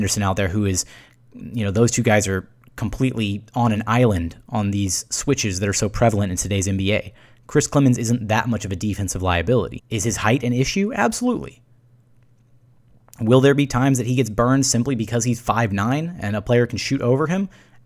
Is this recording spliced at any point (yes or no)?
yes